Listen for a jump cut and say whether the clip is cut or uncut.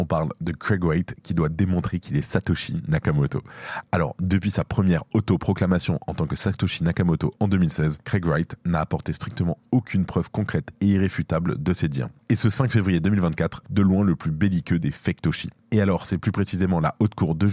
cut